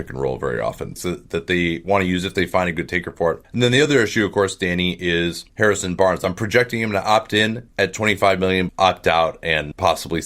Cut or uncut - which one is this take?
cut